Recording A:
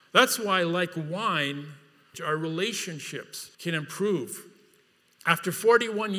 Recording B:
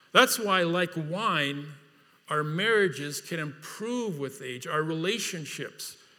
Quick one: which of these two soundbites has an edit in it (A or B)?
A